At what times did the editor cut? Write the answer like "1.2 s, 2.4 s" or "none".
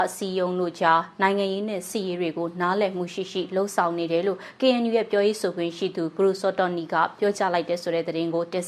none